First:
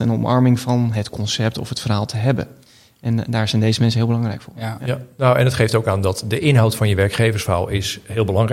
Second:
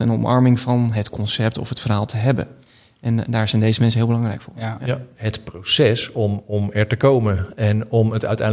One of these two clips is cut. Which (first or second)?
second